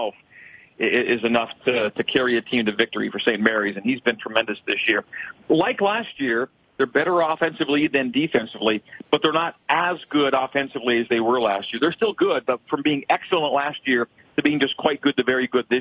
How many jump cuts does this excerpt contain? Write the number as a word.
zero